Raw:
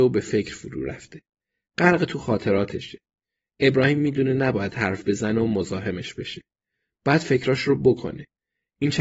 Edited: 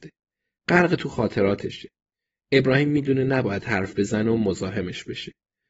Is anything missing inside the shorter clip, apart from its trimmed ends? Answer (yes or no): no